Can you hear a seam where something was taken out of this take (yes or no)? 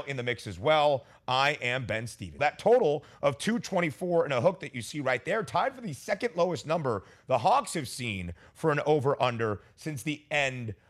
yes